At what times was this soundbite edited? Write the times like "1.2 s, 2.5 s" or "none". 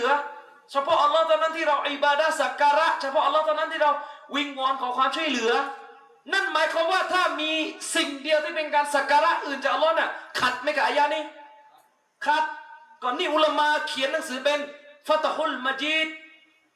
none

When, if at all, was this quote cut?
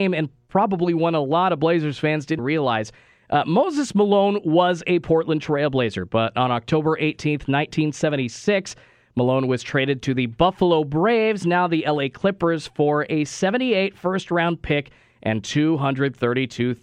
2.4 s

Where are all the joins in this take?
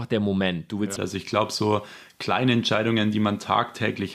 1.0 s

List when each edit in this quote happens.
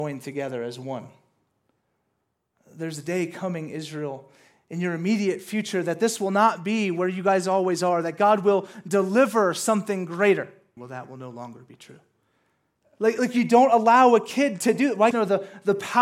10.8 s, 12.8 s, 15.1 s

